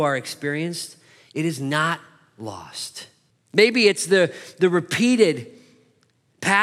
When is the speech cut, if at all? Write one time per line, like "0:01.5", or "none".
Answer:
0:03.3